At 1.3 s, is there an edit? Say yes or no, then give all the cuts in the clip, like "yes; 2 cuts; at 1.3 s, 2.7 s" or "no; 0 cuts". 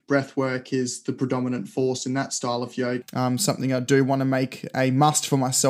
no; 1 cut; at 3.0 s